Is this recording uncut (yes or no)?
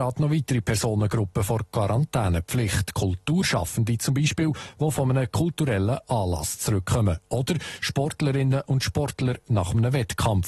yes